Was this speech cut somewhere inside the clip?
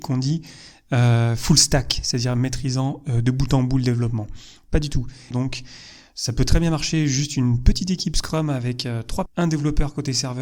yes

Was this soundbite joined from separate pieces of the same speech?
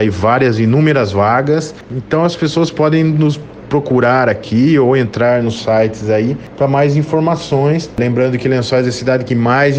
yes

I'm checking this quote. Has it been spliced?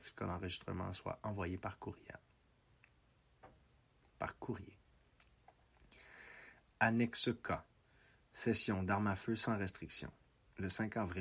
no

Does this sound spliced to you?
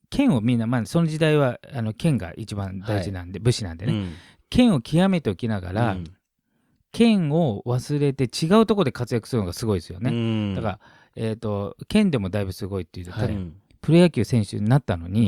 yes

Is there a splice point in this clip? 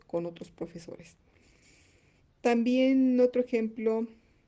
yes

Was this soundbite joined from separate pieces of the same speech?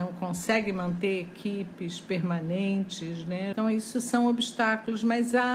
yes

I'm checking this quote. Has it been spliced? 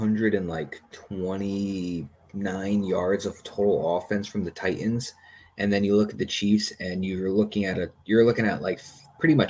no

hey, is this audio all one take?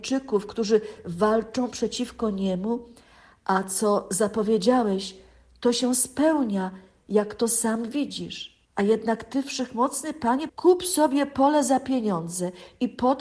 no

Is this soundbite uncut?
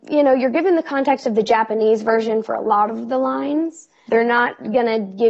no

